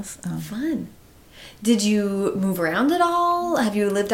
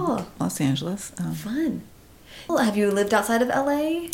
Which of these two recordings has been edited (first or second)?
second